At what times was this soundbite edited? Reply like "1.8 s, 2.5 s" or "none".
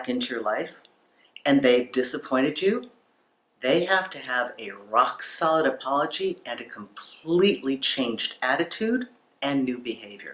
none